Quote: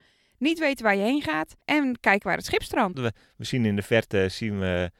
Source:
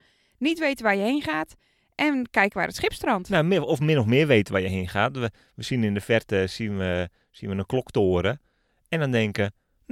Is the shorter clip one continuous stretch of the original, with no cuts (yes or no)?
no